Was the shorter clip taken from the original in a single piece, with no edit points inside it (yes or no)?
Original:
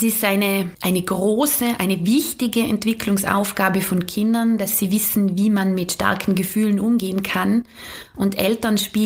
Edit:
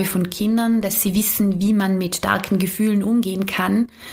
yes